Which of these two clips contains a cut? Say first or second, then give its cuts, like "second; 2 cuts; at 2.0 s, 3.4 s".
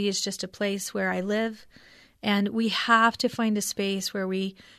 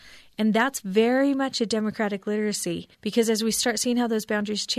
second; 1 cut; at 2.9 s